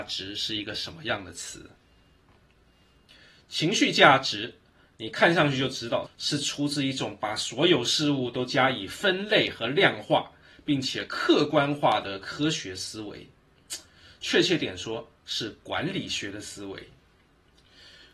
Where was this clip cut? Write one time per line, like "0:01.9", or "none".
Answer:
0:06.1